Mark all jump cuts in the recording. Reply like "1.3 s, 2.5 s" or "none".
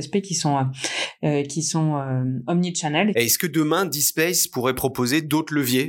3.1 s